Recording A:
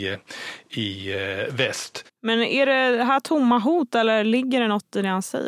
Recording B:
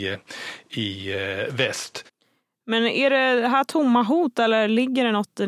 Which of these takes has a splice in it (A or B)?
A